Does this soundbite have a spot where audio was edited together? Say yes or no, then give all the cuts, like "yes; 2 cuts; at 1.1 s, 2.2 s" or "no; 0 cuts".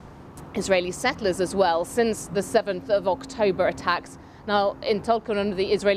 no; 0 cuts